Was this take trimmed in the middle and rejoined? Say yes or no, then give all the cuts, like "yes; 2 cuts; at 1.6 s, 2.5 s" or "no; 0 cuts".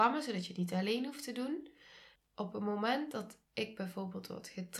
yes; 1 cut; at 2.2 s